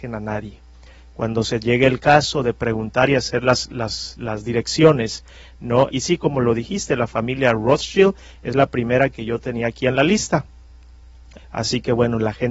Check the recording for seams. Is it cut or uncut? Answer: cut